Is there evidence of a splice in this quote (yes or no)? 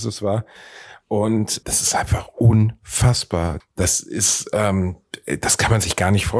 yes